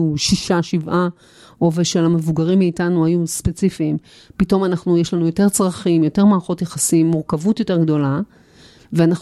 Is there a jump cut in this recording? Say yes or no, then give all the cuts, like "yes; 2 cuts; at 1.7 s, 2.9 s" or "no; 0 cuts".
no; 0 cuts